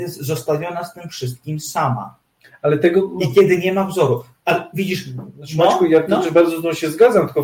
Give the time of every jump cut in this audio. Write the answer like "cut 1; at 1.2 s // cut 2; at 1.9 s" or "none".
none